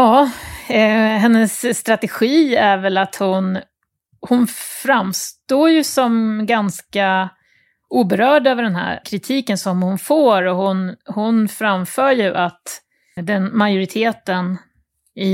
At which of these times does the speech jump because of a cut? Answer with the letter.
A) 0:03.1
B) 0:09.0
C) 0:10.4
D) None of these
B